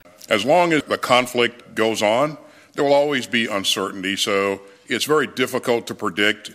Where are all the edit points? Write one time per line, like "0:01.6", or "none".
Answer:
none